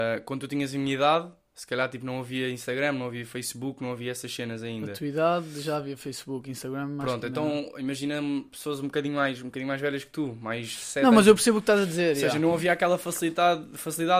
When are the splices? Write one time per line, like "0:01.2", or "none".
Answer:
none